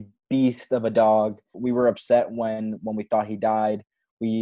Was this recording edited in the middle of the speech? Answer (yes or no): yes